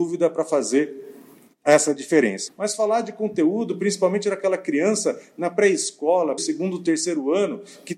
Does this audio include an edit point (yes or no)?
yes